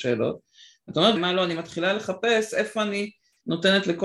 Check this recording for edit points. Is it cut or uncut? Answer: cut